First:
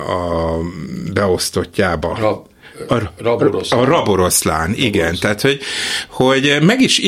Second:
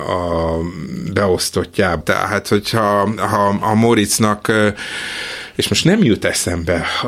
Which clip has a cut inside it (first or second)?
second